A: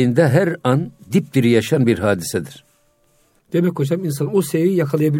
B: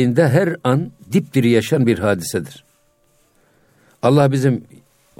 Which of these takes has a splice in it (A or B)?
A